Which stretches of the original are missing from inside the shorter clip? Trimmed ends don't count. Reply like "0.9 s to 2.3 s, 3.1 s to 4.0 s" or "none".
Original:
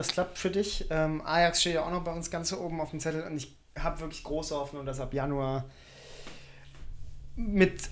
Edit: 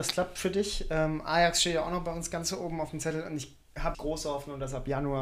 3.9 s to 4.2 s